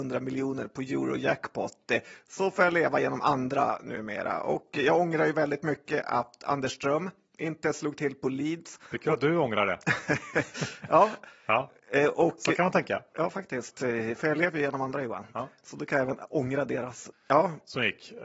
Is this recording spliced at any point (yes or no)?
yes